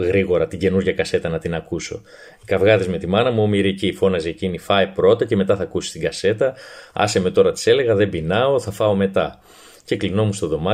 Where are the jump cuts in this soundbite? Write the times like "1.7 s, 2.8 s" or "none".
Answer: none